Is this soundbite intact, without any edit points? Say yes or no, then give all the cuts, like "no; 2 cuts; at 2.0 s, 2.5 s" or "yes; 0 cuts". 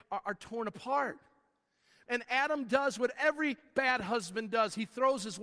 no; 1 cut; at 2.1 s